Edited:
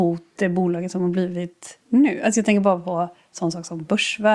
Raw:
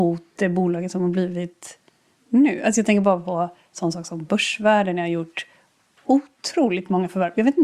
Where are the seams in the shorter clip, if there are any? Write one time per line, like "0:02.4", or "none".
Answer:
0:01.8